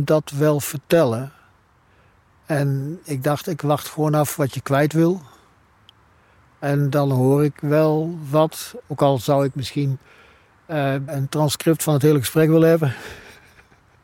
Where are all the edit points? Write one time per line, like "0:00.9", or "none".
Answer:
0:08.8
0:11.1

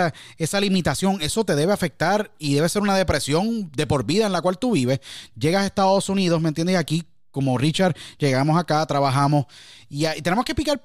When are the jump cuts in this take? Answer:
0:08.1

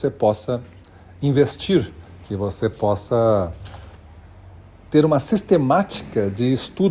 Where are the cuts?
none

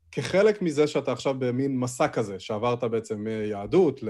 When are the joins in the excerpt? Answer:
none

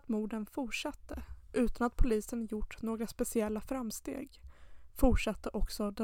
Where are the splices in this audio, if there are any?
none

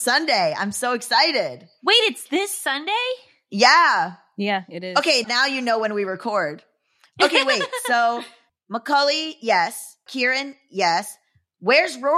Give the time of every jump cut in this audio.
0:05.2

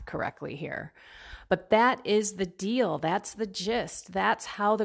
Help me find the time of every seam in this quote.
none

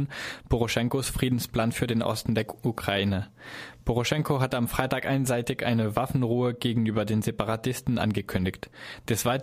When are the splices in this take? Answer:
none

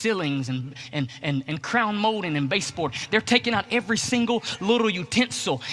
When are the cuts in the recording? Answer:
0:01.4

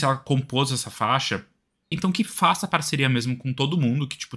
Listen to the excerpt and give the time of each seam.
0:01.9

